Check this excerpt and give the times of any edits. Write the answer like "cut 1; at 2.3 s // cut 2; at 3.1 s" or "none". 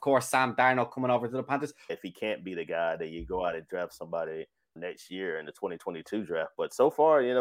cut 1; at 1.9 s // cut 2; at 4.8 s